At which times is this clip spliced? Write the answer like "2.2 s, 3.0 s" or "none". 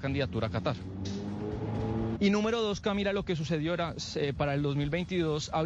2.2 s